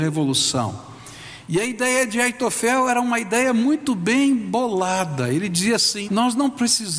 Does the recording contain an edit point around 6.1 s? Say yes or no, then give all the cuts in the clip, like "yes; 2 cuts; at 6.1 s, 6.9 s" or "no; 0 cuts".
yes; 1 cut; at 6.1 s